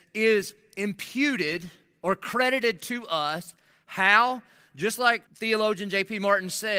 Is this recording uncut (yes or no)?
no